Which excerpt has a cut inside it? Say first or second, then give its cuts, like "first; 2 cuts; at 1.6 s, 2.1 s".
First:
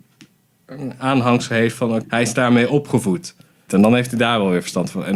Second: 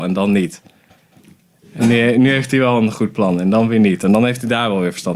first; 2 cuts; at 2.0 s, 3.7 s